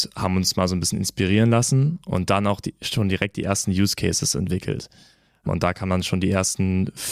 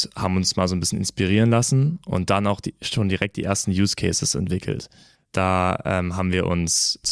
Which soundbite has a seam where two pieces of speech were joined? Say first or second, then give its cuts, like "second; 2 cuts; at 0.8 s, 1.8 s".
second; 1 cut; at 5.1 s